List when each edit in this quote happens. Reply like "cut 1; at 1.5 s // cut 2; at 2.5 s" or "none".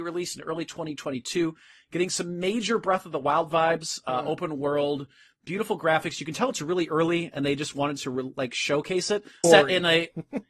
cut 1; at 9.4 s

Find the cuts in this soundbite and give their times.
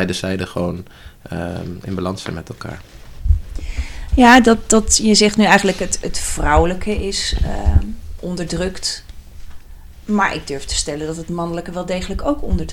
none

